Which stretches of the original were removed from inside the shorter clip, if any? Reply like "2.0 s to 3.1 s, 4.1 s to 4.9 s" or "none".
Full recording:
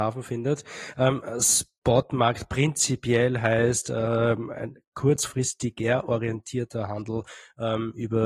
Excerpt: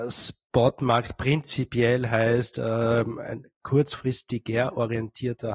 none